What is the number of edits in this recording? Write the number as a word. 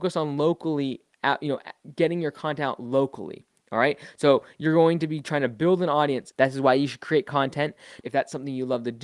two